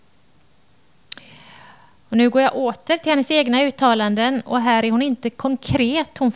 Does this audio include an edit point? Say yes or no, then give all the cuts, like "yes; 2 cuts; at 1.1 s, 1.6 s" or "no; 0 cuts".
no; 0 cuts